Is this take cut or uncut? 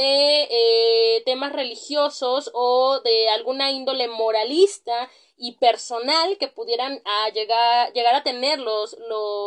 uncut